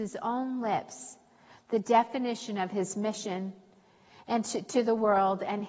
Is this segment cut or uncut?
uncut